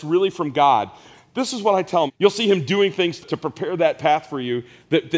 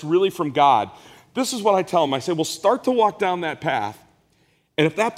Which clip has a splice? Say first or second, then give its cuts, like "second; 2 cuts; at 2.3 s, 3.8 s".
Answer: first; 2 cuts; at 2.1 s, 3.2 s